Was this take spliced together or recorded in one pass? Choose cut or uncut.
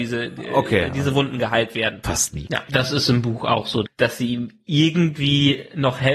cut